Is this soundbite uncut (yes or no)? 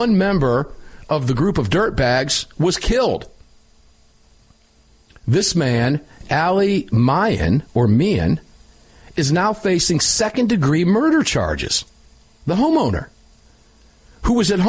yes